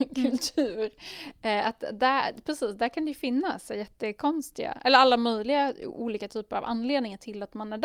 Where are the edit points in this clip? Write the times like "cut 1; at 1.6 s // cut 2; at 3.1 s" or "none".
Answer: none